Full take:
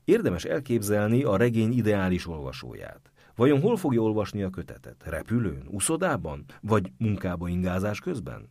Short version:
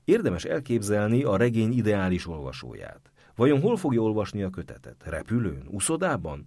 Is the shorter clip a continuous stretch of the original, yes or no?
yes